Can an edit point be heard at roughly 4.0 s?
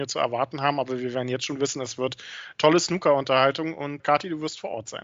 yes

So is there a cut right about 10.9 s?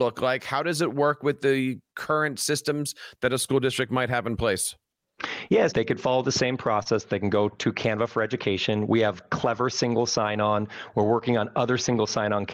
no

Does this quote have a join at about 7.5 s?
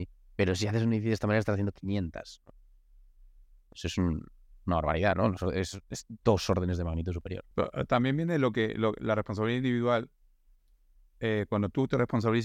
yes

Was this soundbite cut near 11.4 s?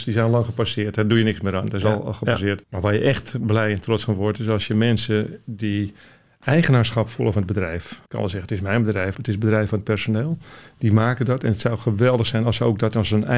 no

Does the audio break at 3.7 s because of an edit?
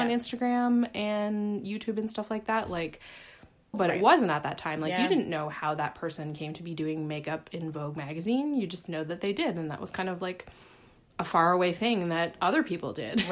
yes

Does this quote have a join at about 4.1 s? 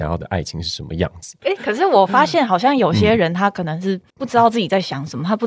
yes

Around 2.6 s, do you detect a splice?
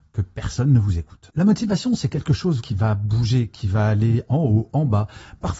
yes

